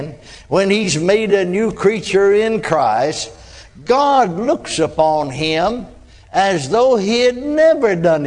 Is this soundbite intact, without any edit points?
yes; 0 cuts

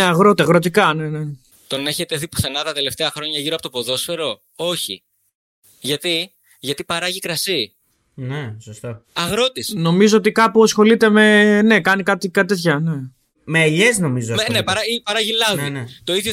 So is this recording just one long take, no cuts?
no; 1 cut; at 1.5 s

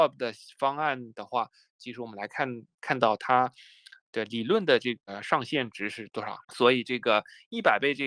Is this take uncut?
no; 1 cut; at 6.4 s

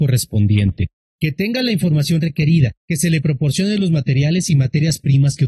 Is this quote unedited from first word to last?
no; 2 cuts; at 1.0 s, 2.8 s

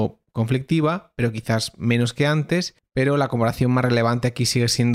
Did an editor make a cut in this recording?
no; 0 cuts

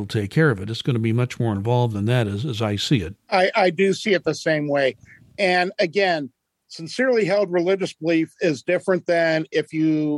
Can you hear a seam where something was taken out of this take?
yes; 1 cut; at 3.1 s

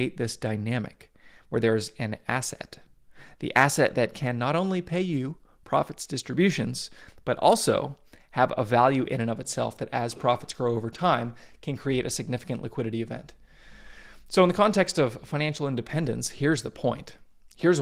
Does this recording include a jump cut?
no; 0 cuts

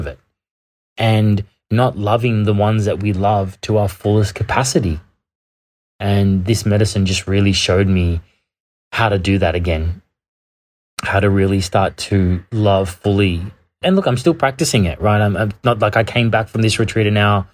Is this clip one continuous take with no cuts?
yes; 0 cuts

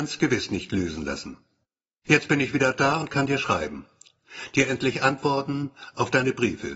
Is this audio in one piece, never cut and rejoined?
no; 1 cut; at 2.0 s

